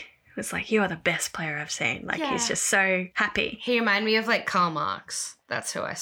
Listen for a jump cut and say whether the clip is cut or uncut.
uncut